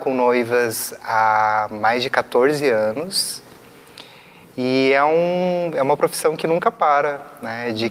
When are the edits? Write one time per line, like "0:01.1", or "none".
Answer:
none